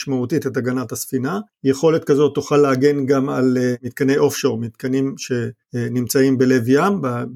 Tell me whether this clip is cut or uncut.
uncut